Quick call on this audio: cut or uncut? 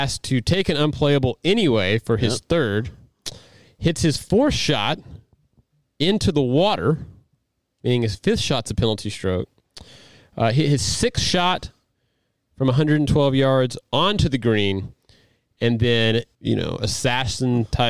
cut